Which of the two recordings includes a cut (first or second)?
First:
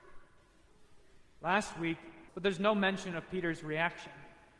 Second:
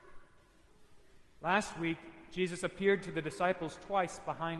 first